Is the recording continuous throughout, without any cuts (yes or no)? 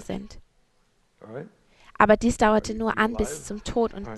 yes